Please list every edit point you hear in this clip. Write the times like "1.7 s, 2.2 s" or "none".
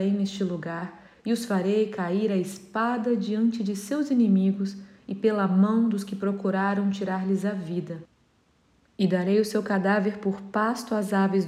none